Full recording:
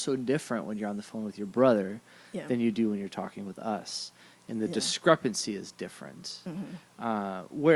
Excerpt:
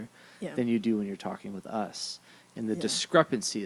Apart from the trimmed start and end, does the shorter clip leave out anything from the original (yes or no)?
no